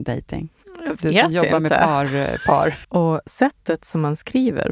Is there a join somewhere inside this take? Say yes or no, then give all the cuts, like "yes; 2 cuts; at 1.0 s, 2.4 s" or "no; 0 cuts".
yes; 1 cut; at 2.8 s